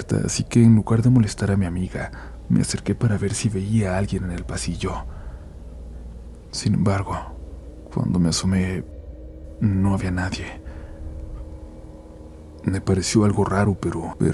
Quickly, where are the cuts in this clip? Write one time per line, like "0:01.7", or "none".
none